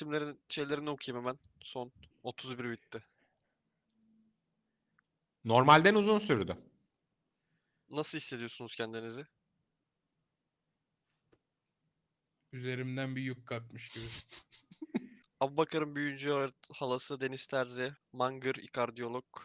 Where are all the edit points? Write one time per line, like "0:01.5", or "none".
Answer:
0:02.1
0:15.2
0:18.0